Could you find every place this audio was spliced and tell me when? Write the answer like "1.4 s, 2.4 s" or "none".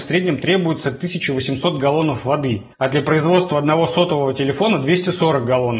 2.7 s